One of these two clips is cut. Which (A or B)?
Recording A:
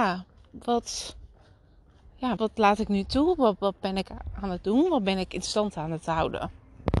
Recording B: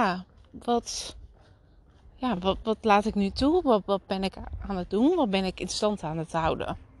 A